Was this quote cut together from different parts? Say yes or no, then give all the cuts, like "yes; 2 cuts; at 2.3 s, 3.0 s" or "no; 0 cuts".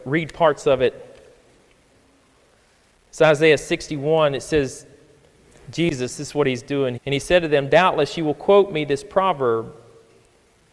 yes; 1 cut; at 7.0 s